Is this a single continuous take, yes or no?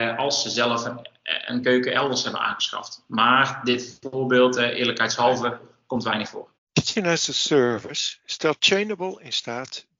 no